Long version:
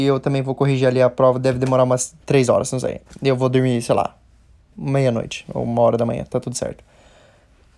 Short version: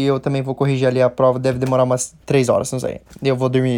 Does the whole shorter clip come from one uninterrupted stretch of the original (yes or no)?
yes